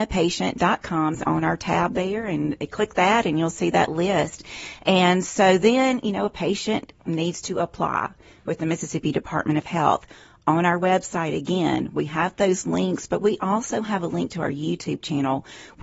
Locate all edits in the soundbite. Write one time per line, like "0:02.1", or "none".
0:01.1

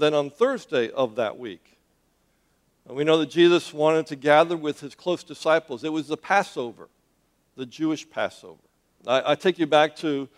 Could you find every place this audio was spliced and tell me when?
0:08.9

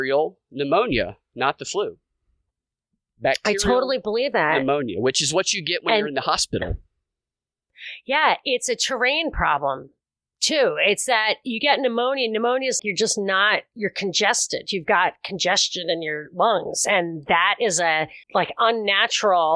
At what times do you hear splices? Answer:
0:12.8
0:18.2

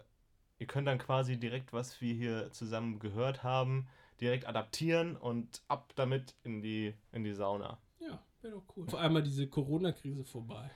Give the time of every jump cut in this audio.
0:07.0
0:08.9

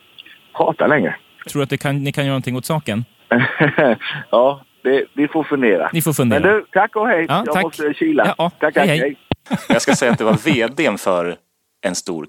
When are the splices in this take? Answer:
none

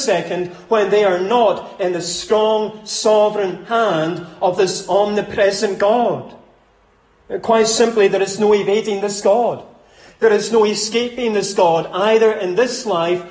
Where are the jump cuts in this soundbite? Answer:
none

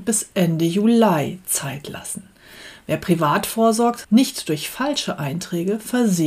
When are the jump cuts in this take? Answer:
0:04.0

